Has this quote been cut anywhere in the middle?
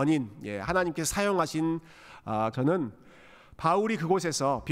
yes; 1 cut; at 2.5 s

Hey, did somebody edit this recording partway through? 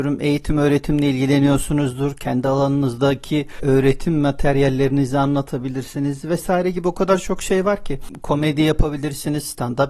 no; 0 cuts

